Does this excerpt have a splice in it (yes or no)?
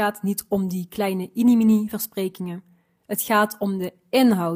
no